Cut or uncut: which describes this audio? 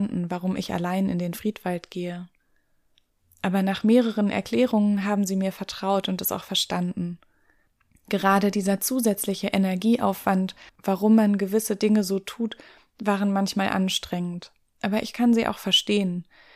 cut